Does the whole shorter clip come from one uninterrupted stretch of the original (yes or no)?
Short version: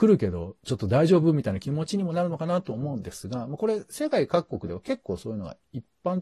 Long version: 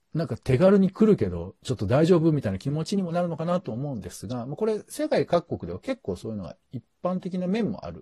yes